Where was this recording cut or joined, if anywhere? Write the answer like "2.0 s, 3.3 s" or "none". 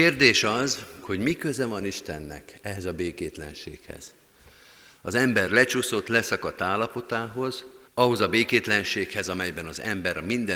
1.0 s, 7.9 s